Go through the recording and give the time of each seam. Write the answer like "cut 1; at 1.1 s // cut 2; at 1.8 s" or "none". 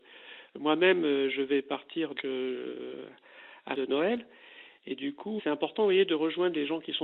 cut 1; at 2.2 s // cut 2; at 3.7 s // cut 3; at 5.4 s